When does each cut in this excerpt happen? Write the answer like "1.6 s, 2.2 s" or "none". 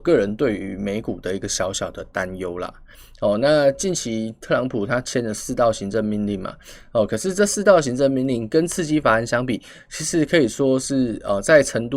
none